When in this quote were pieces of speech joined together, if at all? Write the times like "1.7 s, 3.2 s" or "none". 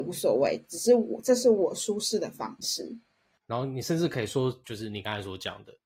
3.4 s, 4.6 s

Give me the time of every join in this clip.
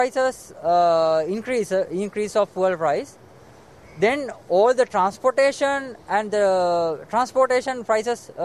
none

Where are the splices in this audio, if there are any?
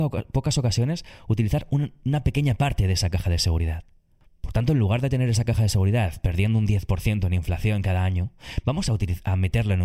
none

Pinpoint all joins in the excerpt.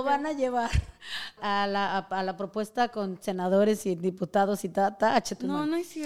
1.4 s

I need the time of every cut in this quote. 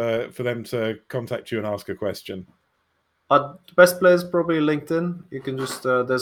none

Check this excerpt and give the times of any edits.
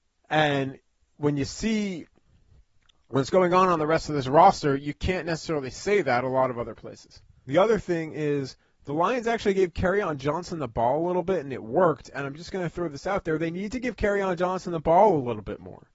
7.4 s

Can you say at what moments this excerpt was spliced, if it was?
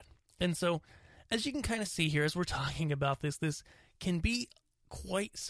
none

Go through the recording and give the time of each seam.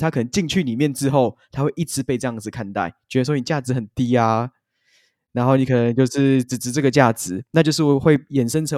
none

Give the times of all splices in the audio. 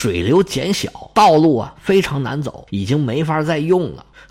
none

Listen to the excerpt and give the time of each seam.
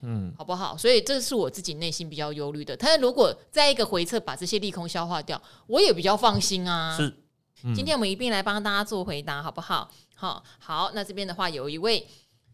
7.6 s

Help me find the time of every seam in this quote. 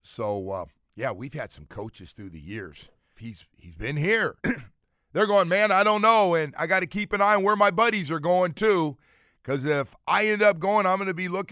3.1 s, 4.4 s

